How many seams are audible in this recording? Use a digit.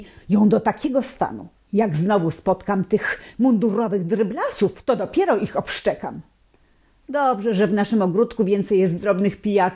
0